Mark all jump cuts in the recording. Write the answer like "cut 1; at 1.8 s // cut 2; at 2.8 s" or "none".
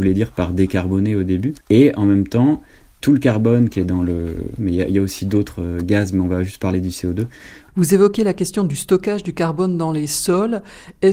cut 1; at 1.6 s // cut 2; at 4.6 s // cut 3; at 7.7 s